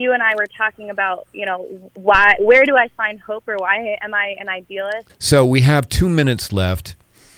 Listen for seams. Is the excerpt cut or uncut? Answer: cut